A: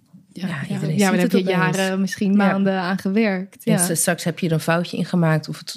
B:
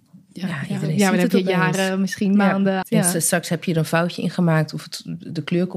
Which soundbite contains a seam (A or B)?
B